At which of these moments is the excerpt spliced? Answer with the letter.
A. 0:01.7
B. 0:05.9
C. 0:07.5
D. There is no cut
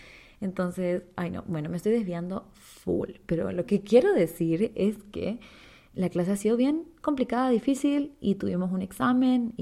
B